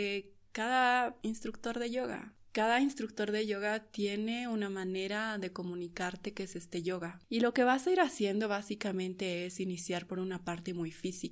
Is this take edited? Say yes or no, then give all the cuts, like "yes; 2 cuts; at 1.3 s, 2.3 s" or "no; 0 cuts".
no; 0 cuts